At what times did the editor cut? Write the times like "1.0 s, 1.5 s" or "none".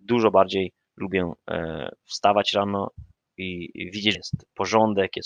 4.1 s